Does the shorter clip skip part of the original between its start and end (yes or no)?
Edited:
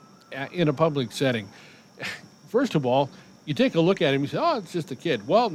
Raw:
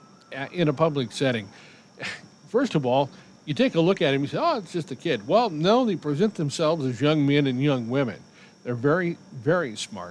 no